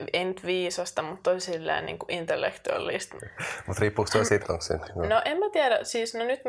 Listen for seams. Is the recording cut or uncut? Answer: cut